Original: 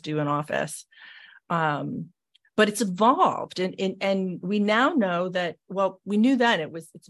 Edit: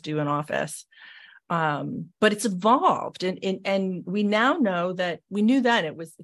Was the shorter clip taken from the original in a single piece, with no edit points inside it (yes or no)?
no